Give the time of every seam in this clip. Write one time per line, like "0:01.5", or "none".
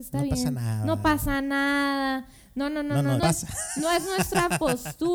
0:03.2

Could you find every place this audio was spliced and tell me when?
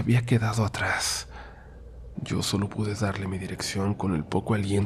0:02.1

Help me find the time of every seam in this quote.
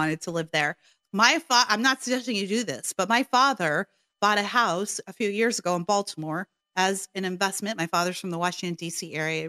0:01.0

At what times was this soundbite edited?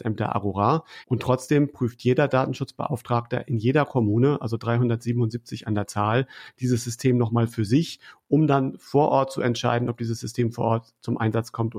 0:01.0

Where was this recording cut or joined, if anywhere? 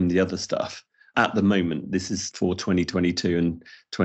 none

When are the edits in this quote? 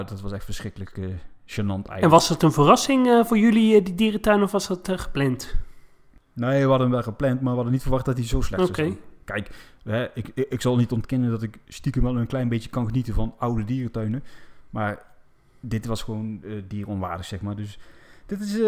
none

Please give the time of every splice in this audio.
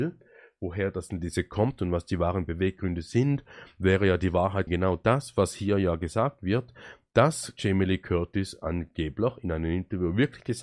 0:04.7

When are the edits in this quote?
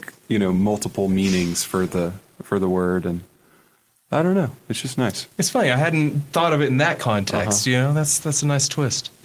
none

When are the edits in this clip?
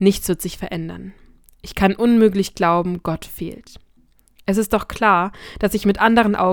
none

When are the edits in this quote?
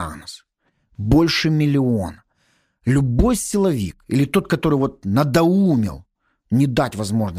none

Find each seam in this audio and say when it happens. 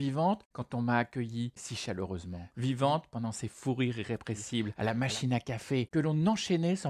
0:01.6

